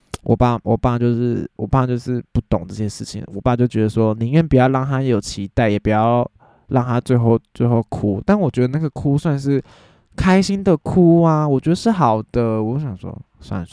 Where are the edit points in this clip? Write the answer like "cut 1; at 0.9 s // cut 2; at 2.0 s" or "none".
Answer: none